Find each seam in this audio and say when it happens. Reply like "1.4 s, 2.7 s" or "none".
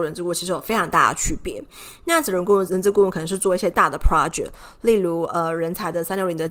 2.7 s